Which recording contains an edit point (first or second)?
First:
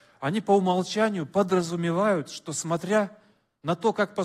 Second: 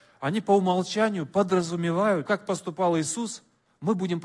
second